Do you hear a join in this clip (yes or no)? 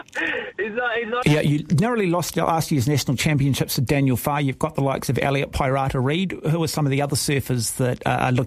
yes